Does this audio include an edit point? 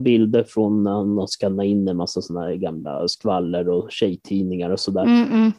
no; 0 cuts

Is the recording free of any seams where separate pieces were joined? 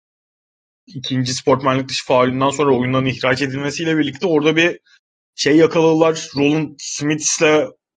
yes; 0 cuts

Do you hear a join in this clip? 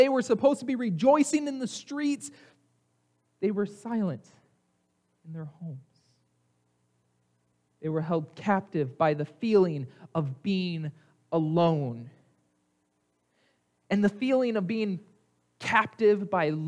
no; 0 cuts

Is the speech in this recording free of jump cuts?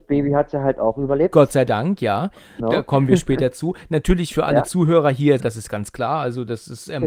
no; 2 cuts; at 2.6 s, 5.4 s

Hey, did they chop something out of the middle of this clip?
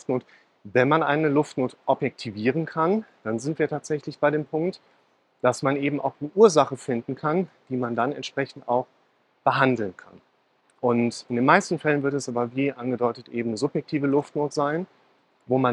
no; 0 cuts

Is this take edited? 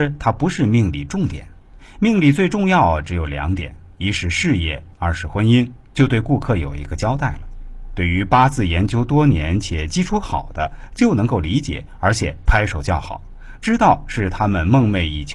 yes; 1 cut; at 5.9 s

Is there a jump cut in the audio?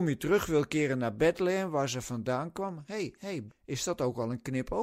yes; 1 cut; at 3.5 s

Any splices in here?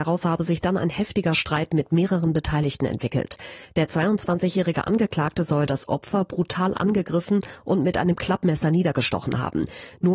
no; 0 cuts

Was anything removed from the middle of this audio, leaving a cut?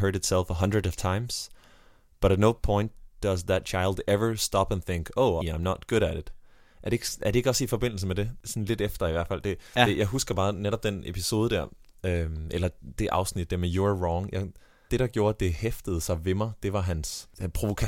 yes; 2 cuts; at 5.4 s, 14.9 s

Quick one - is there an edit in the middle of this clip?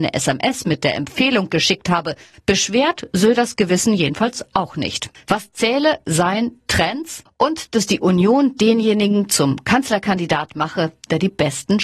yes; 3 cuts; at 2.3 s, 5.1 s, 7.3 s

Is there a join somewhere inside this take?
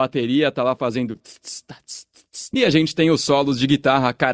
yes; 1 cut; at 2.5 s

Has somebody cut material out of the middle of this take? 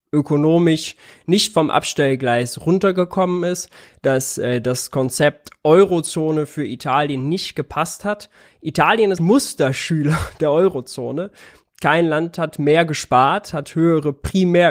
yes; 1 cut; at 9.2 s

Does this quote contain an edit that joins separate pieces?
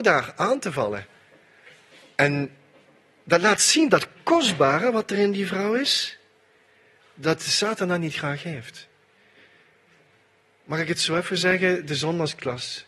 no; 0 cuts

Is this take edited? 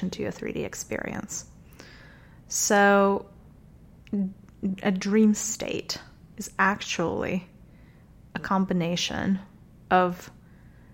no; 0 cuts

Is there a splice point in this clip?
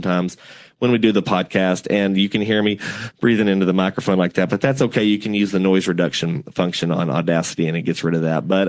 no; 0 cuts

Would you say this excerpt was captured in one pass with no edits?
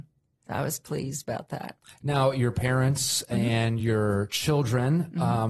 yes; 0 cuts

